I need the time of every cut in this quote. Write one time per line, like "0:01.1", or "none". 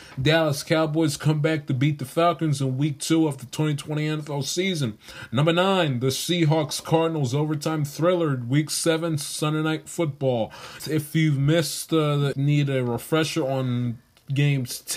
0:10.8
0:12.3